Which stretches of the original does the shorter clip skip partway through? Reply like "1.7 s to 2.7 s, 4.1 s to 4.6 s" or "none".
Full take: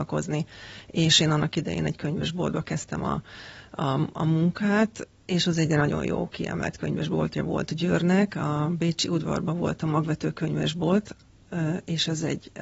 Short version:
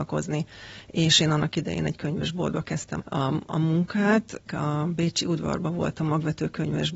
3.0 s to 3.7 s, 5.1 s to 8.3 s